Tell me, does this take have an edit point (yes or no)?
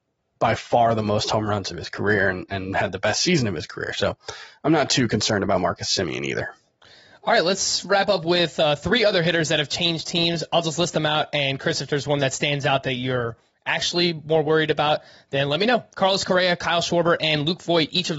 no